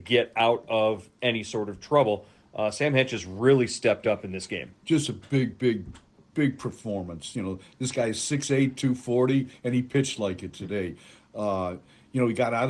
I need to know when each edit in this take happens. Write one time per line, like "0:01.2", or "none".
none